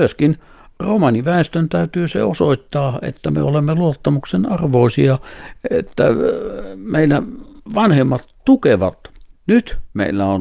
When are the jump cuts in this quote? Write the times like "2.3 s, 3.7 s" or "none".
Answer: 9.3 s